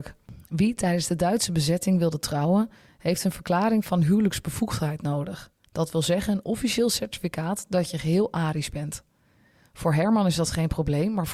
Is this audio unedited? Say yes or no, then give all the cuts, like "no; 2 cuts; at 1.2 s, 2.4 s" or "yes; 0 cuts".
yes; 0 cuts